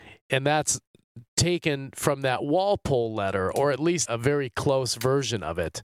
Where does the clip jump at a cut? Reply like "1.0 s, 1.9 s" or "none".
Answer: 4.1 s